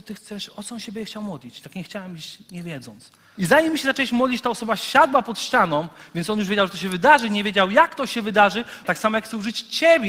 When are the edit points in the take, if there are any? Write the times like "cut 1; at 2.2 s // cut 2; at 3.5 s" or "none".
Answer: cut 1; at 3.4 s // cut 2; at 8.8 s